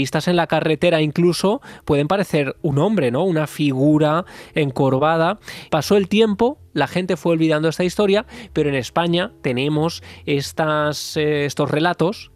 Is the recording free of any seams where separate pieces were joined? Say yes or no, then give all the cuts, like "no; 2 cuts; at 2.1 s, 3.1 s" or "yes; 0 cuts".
no; 1 cut; at 5.7 s